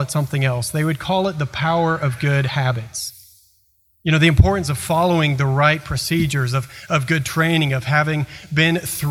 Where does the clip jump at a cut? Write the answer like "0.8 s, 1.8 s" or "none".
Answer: none

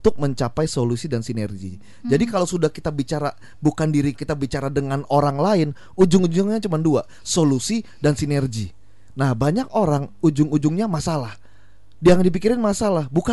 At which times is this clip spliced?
4.1 s

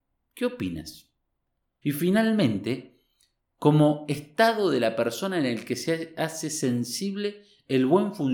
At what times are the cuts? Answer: 1.8 s

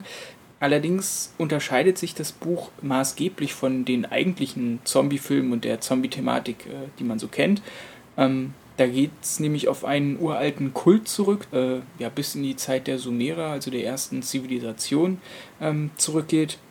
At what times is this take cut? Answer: 11.5 s

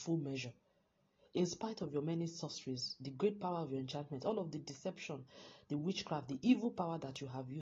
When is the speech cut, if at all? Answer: none

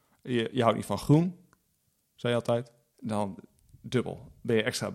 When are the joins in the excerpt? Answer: 2.9 s

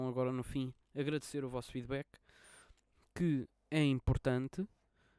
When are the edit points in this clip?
none

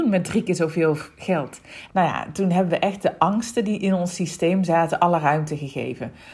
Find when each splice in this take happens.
1.9 s

